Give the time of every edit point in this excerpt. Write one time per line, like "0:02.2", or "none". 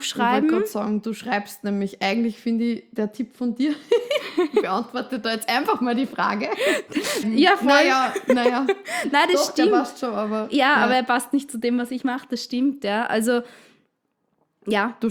0:07.2